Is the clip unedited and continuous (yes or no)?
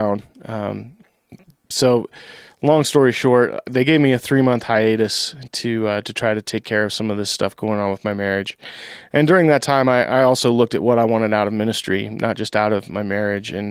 no